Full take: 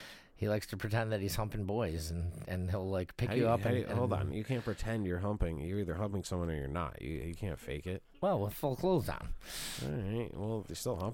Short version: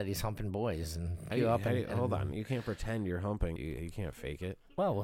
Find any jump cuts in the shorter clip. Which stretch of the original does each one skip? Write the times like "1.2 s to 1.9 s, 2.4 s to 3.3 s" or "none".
2.5 s to 3.3 s, 5.6 s to 7.0 s